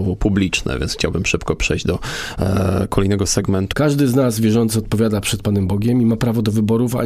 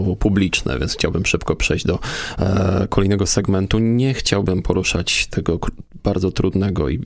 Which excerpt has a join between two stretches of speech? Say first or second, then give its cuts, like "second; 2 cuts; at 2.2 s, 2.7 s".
first; 1 cut; at 3.7 s